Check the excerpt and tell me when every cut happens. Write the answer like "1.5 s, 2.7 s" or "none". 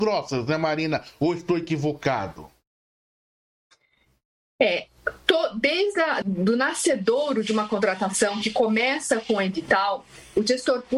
6.2 s